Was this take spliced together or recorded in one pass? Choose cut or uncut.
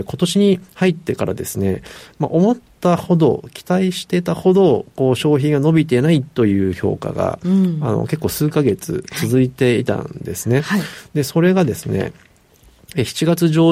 uncut